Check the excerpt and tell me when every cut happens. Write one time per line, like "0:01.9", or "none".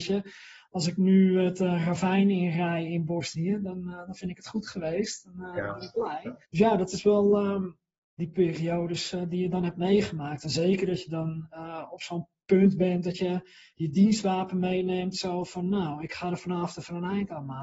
0:06.4
0:08.2